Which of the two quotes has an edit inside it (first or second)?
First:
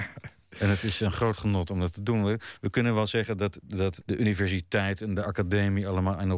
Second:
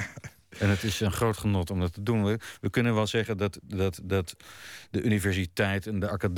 first